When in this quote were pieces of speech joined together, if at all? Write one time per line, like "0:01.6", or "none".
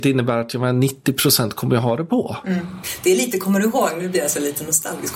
none